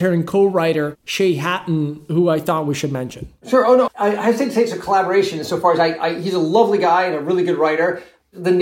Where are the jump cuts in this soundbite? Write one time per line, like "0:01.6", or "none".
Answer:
0:03.9